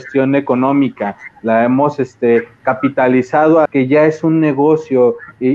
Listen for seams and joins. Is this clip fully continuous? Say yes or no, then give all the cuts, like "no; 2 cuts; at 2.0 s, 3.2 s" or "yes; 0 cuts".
no; 1 cut; at 3.7 s